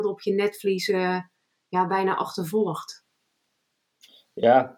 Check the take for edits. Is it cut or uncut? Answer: uncut